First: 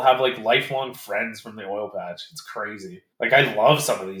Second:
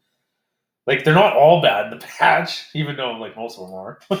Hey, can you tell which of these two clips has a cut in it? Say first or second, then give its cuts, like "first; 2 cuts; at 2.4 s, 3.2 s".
first; 1 cut; at 3.1 s